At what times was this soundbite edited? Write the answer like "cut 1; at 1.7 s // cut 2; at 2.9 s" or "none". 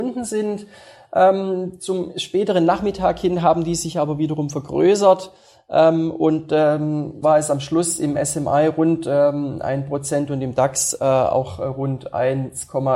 cut 1; at 7.2 s